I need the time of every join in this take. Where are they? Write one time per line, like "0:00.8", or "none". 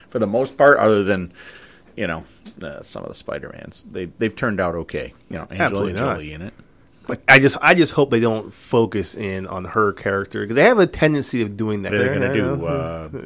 0:05.3
0:11.9